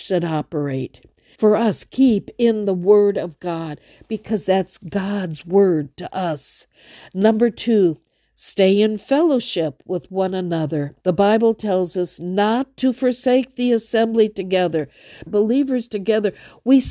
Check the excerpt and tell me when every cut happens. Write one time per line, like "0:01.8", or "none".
0:01.3
0:11.0
0:15.3